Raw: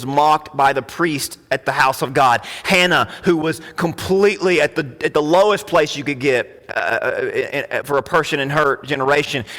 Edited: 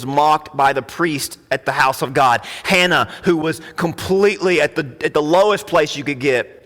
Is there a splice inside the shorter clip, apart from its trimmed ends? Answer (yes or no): no